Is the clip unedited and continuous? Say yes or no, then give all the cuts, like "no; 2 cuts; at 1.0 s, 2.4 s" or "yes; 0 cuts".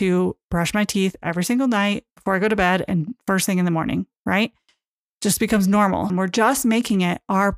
no; 1 cut; at 6.1 s